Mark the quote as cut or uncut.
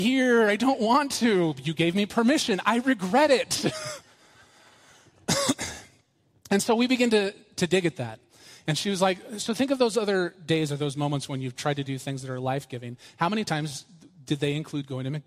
uncut